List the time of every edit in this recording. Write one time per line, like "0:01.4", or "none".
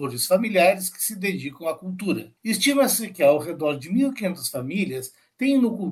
0:02.4